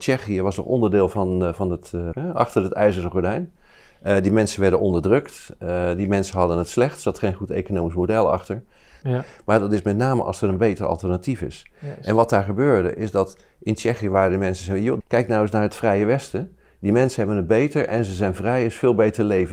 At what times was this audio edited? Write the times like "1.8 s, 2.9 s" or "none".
2.1 s, 9.0 s, 15.0 s